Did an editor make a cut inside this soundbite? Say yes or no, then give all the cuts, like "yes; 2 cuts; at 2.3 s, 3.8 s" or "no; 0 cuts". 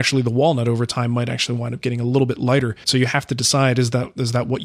yes; 1 cut; at 2.8 s